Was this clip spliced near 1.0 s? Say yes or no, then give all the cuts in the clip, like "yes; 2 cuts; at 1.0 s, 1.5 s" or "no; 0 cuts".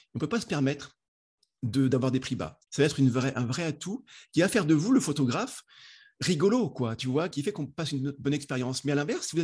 no; 2 cuts; at 2.7 s, 7.3 s